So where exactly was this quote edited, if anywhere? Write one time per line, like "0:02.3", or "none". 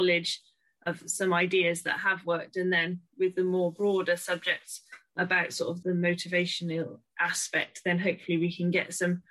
0:05.8